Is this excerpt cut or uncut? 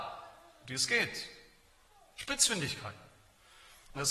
uncut